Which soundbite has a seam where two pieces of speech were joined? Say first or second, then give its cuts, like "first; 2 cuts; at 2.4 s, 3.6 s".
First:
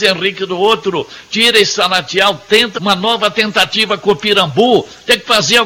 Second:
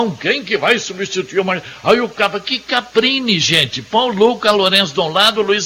first; 1 cut; at 2.7 s